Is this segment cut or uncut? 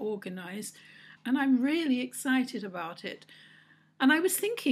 cut